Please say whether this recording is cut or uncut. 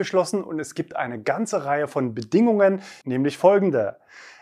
cut